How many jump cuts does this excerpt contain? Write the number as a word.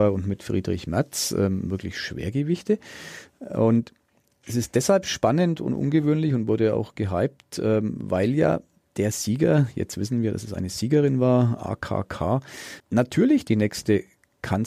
one